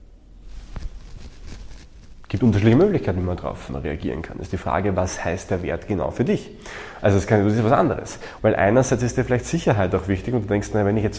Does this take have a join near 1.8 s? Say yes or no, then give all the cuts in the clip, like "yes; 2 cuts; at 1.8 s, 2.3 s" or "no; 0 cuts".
no; 3 cuts; at 3.7 s, 7.0 s, 8.4 s